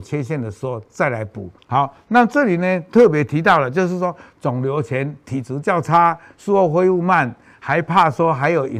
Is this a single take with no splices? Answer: no; 1 cut; at 1.6 s

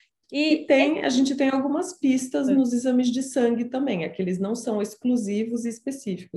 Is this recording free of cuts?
yes; 0 cuts

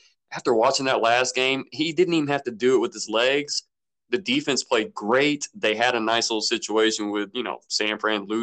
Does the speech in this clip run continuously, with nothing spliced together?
yes; 0 cuts

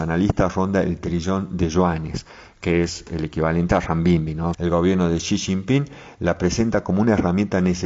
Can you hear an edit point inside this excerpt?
yes; 1 cut; at 4.5 s

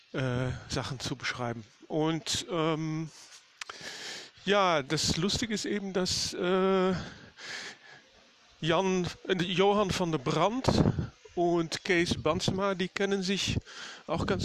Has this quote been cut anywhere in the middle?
no; 0 cuts

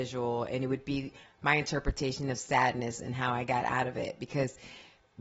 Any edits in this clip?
no; 0 cuts

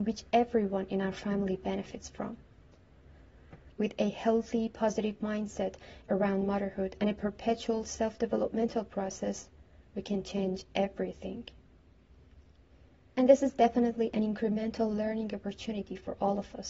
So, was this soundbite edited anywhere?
yes; 2 cuts; at 3.7 s, 13.1 s

